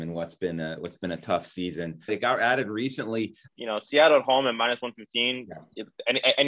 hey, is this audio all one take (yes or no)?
no